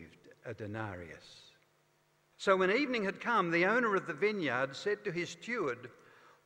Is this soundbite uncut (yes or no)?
no